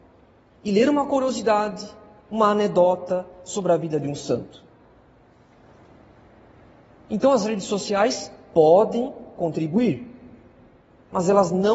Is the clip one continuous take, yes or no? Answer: yes